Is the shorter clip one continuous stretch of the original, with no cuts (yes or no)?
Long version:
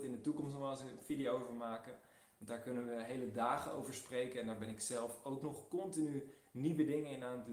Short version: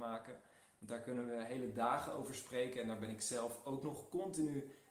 yes